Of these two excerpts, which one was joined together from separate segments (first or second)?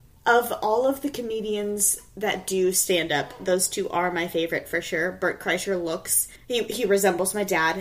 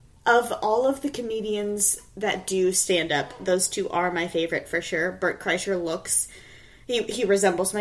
first